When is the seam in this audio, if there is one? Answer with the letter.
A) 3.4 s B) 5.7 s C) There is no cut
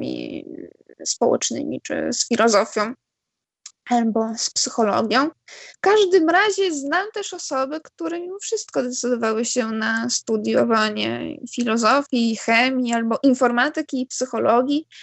B